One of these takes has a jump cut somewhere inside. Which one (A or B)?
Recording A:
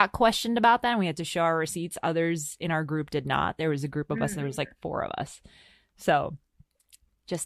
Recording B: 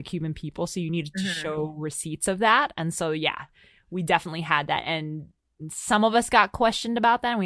B